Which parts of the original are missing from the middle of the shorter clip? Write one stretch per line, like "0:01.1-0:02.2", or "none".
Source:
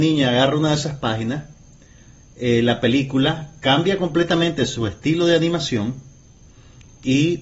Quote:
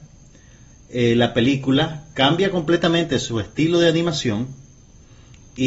none